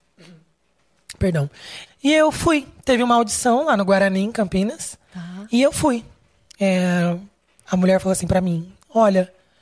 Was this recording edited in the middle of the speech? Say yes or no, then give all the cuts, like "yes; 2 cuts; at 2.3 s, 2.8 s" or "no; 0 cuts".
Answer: yes; 1 cut; at 1.9 s